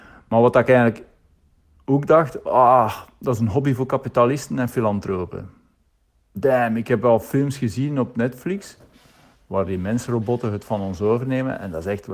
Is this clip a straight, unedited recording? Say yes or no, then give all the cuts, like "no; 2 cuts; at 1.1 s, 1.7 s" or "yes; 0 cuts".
yes; 0 cuts